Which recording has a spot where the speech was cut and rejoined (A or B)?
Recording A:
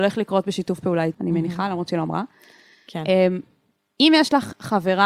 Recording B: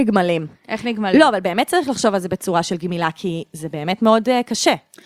A